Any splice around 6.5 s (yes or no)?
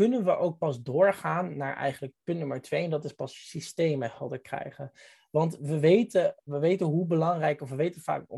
yes